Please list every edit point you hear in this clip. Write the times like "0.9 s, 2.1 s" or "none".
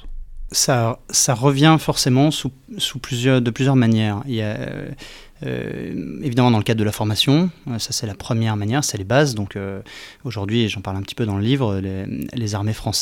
none